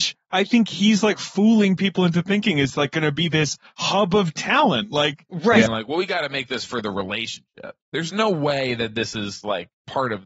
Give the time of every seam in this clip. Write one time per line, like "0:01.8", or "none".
0:05.7
0:07.8